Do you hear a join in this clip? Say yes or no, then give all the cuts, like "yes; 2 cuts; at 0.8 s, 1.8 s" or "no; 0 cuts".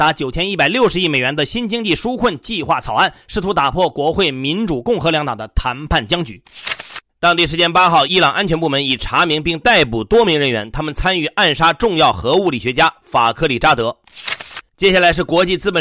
yes; 1 cut; at 8.1 s